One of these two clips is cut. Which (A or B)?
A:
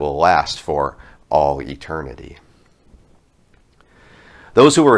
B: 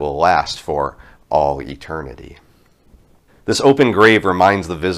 B